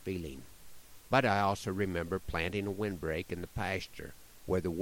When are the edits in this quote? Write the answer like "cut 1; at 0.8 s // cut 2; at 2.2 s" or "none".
none